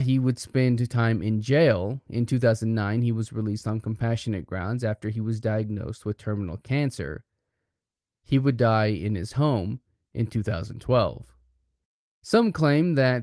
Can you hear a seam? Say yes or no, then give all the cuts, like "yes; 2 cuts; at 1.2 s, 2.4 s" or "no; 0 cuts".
no; 0 cuts